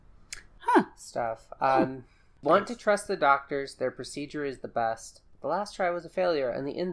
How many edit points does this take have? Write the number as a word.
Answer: zero